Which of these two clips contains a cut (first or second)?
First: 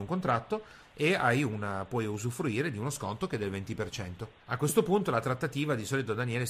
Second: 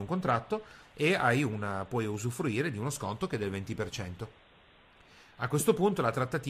first